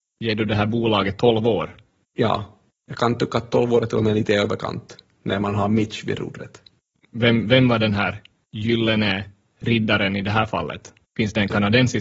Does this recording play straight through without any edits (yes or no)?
yes